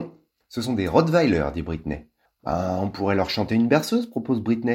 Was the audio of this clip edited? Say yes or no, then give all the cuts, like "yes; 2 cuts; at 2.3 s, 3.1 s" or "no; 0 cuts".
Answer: yes; 1 cut; at 2.2 s